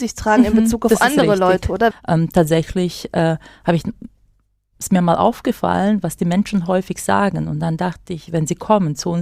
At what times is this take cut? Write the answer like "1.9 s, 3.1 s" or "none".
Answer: 1.9 s

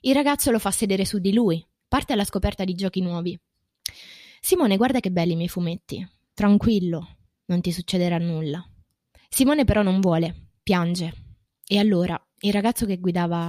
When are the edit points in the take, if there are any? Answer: 1.8 s, 9.2 s

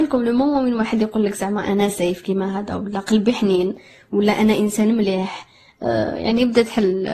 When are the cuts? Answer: none

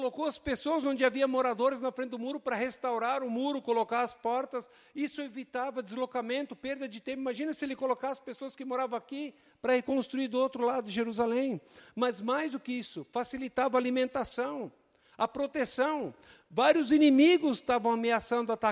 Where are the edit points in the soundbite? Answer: none

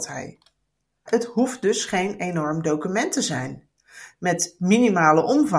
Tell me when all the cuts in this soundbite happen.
1.1 s

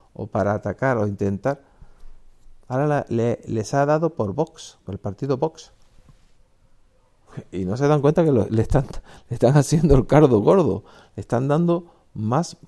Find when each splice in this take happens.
none

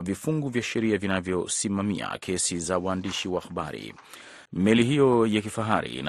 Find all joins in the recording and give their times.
4.5 s

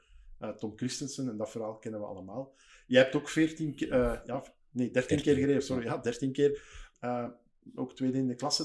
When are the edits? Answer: 6.9 s

